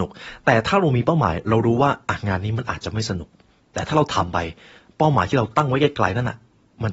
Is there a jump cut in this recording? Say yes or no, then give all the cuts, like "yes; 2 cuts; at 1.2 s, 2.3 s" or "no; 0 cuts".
no; 0 cuts